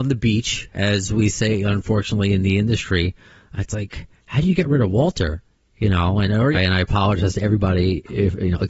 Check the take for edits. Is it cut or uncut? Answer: cut